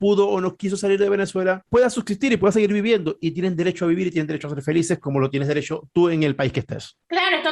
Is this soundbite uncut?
yes; 0 cuts

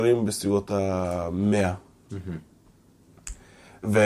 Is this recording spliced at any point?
yes; 1 cut; at 2.1 s

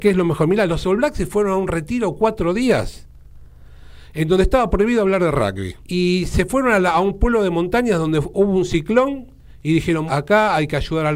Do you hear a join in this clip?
yes; 2 cuts; at 5.8 s, 10.1 s

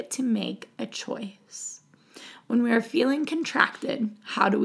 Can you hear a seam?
no; 0 cuts

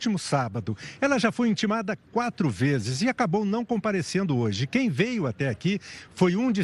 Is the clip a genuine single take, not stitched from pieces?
yes; 0 cuts

